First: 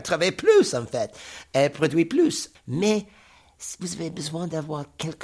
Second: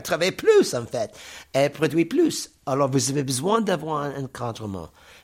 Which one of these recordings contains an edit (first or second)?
first